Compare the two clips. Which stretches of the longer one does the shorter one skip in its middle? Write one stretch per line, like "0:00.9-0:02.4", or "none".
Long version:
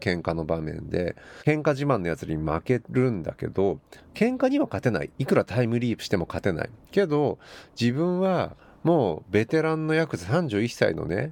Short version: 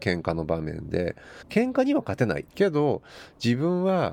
0:01.4-0:04.1
0:05.1-0:06.8